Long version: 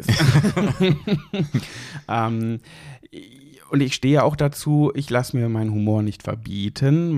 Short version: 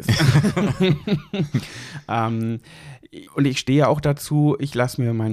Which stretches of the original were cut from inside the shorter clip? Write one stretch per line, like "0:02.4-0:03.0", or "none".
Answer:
0:03.3-0:03.6